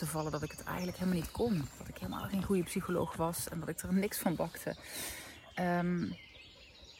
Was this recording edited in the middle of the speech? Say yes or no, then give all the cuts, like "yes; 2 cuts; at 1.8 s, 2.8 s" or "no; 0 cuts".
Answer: no; 0 cuts